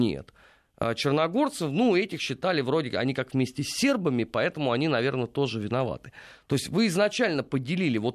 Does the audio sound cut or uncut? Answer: uncut